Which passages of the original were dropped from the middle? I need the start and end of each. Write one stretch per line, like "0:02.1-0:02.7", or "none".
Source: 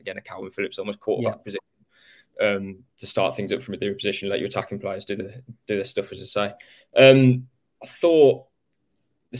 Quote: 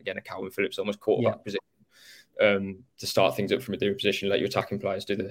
none